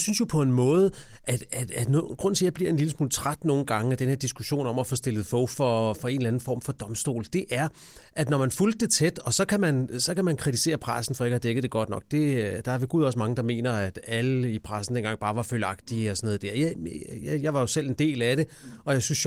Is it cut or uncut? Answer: uncut